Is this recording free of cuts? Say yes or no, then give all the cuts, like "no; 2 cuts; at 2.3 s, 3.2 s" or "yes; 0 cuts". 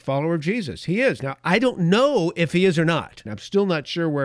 no; 1 cut; at 3.3 s